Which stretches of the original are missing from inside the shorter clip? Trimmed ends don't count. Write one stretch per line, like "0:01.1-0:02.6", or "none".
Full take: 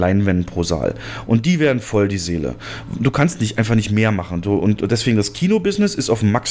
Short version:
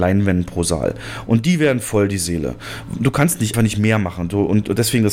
0:03.5-0:03.7